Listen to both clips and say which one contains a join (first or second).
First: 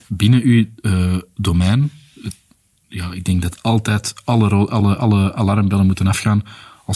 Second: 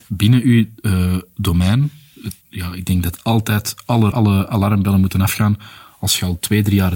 second